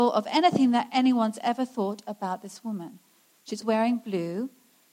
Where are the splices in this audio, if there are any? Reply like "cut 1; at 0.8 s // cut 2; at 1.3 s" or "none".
cut 1; at 3.6 s